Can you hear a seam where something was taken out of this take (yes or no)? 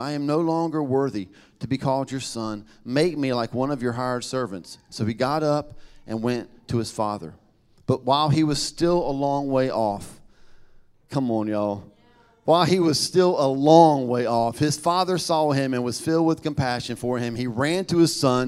no